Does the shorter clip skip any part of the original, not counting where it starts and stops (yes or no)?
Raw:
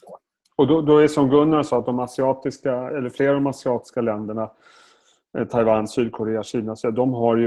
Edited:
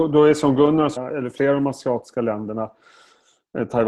yes